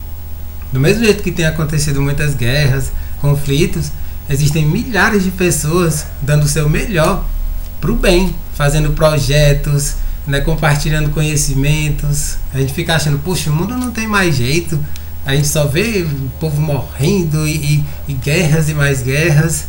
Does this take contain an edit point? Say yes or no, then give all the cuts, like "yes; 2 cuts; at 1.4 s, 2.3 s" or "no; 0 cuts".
yes; 1 cut; at 12.5 s